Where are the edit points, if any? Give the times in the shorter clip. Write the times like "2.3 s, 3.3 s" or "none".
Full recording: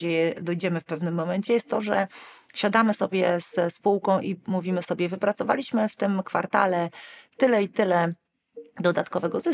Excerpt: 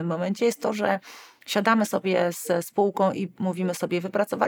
none